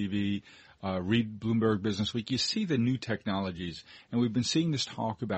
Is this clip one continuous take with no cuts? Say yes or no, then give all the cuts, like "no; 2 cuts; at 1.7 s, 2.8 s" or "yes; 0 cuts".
yes; 0 cuts